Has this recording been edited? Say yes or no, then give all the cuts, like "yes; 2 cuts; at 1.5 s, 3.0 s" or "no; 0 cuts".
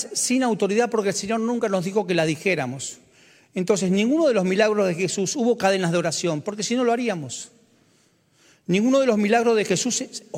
no; 0 cuts